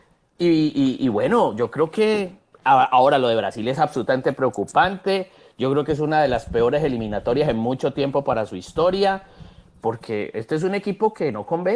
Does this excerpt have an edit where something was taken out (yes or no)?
no